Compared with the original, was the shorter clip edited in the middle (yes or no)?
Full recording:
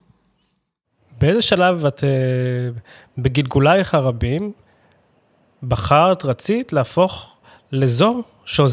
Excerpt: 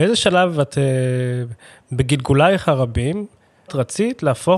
yes